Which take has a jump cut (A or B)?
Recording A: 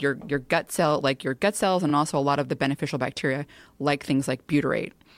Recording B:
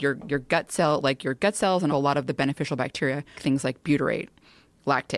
B